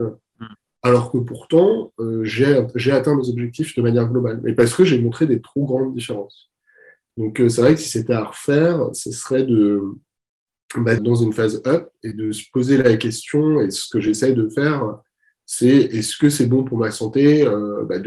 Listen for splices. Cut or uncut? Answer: cut